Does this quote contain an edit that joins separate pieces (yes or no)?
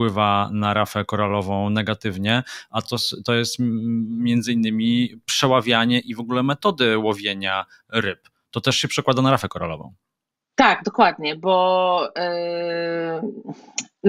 no